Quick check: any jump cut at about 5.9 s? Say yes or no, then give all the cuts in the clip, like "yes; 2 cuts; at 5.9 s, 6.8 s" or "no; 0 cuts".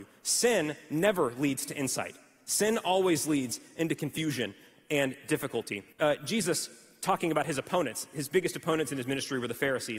yes; 1 cut; at 5.9 s